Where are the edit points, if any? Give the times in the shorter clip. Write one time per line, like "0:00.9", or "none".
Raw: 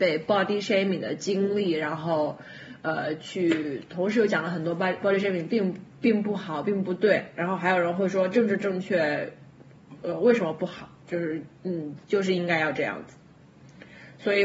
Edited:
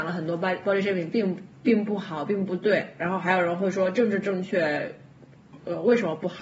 none